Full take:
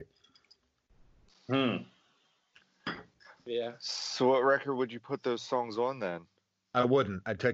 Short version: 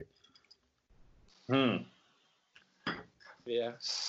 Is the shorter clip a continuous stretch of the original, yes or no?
yes